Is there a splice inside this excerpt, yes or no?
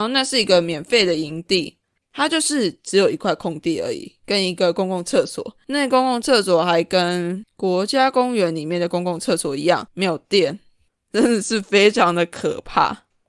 yes